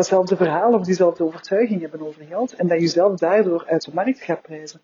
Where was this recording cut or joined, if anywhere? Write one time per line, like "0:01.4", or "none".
none